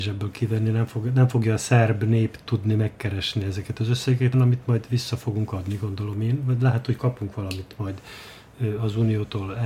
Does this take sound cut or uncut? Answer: cut